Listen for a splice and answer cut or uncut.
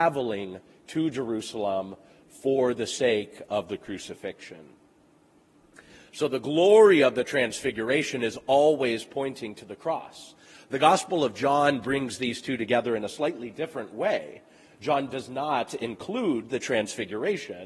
uncut